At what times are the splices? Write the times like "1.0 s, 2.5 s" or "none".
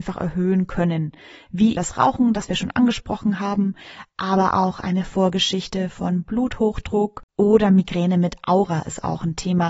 1.8 s, 7.3 s